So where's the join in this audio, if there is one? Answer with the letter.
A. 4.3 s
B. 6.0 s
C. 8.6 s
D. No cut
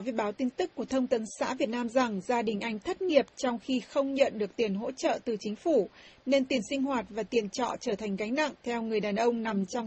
C